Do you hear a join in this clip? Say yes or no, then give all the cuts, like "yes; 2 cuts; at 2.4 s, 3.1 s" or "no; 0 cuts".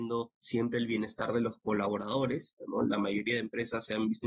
yes; 1 cut; at 2.6 s